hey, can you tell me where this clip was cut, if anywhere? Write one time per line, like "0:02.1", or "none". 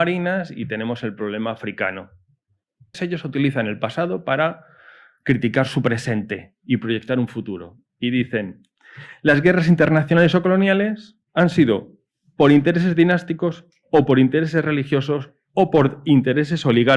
0:02.9